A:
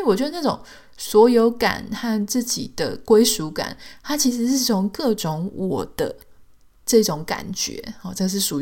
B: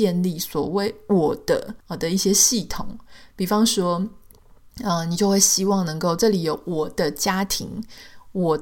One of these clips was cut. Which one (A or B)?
B